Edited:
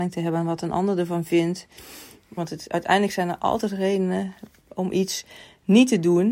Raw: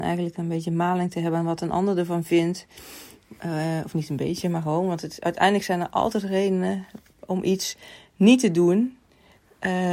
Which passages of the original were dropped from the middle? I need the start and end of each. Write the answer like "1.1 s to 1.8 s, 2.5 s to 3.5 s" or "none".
3.4 s to 4.9 s